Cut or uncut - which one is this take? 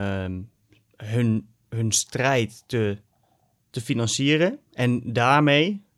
uncut